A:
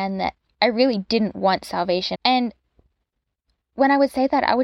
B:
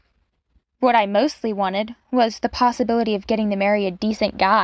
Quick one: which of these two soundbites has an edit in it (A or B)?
A